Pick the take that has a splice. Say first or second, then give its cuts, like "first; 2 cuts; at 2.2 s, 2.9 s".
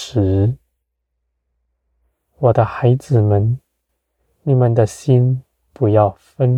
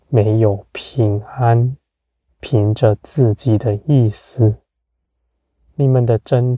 second; 1 cut; at 2.3 s